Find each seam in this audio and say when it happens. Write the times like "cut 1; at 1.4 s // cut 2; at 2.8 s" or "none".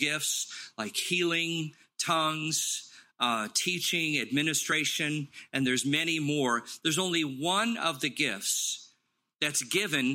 none

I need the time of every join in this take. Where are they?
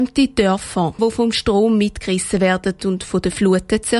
cut 1; at 1.0 s

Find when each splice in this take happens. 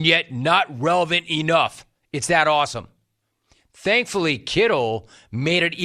none

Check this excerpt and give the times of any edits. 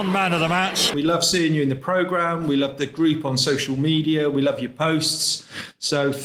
cut 1; at 0.9 s

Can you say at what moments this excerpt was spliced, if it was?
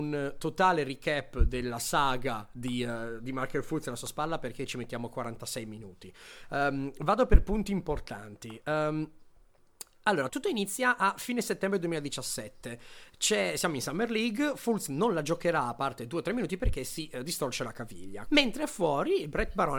cut 1; at 10.3 s // cut 2; at 18.3 s

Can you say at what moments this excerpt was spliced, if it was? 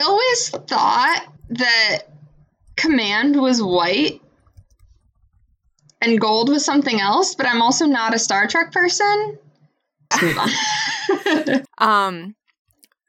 cut 1; at 1.4 s // cut 2; at 10.1 s // cut 3; at 11.6 s

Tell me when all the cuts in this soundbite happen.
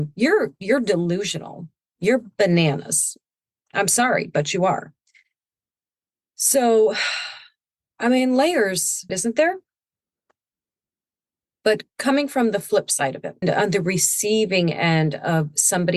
cut 1; at 9.1 s // cut 2; at 13.4 s

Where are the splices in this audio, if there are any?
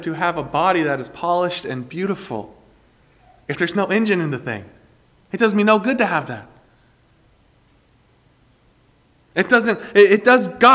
none

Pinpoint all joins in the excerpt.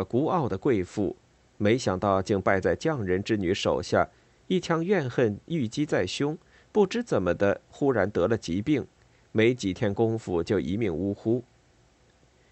none

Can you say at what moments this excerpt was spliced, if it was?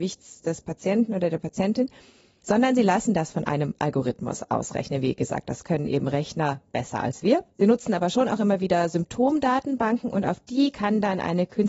cut 1; at 7.5 s

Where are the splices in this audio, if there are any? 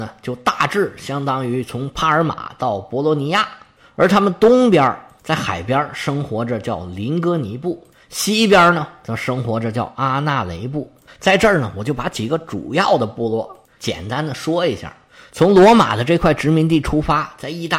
cut 1; at 11.1 s

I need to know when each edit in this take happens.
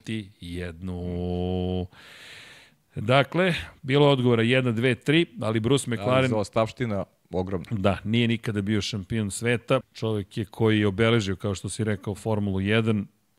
cut 1; at 9.8 s

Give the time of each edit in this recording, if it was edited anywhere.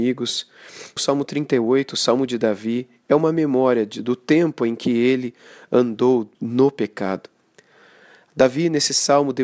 cut 1; at 1.0 s // cut 2; at 6.3 s

